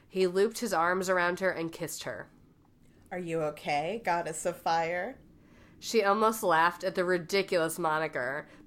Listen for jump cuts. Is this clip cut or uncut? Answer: uncut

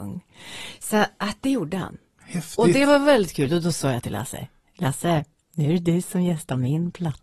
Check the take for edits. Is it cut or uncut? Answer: uncut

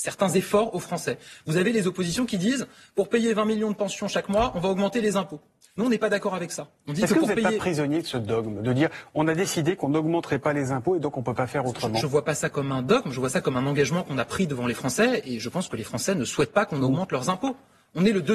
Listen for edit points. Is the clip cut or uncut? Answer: uncut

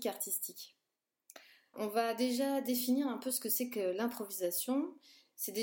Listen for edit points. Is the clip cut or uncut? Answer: cut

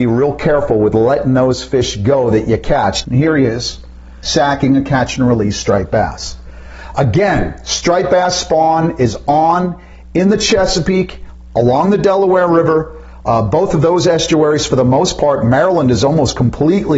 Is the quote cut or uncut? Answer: cut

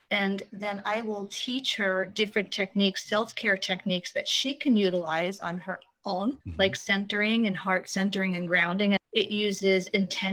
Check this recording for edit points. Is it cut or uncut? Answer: cut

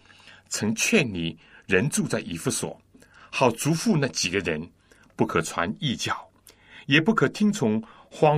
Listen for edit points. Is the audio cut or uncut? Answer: uncut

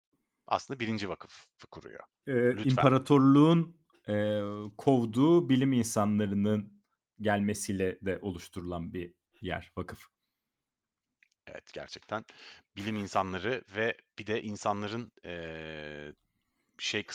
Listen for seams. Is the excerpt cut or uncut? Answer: cut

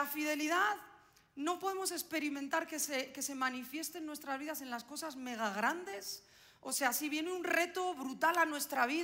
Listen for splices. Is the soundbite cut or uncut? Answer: uncut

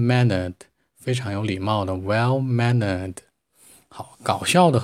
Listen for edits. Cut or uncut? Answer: uncut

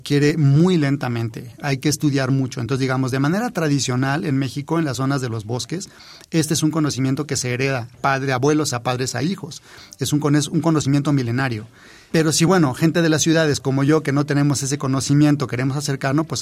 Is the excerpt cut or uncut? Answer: uncut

